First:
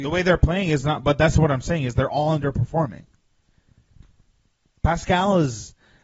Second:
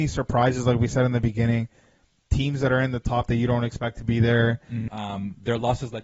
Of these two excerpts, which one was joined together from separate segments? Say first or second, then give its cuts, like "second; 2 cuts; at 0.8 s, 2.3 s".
second; 1 cut; at 4.9 s